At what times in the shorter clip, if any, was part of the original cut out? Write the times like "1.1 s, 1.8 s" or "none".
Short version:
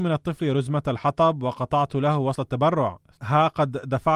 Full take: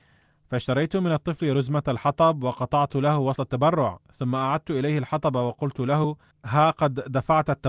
3.2 s